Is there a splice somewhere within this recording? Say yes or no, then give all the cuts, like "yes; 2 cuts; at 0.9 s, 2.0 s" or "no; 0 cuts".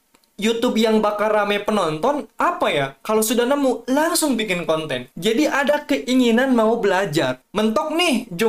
yes; 1 cut; at 5.1 s